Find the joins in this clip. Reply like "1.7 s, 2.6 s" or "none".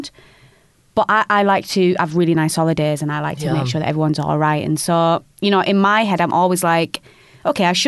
none